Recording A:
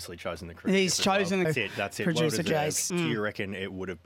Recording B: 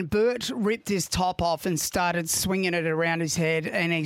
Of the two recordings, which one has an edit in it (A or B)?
A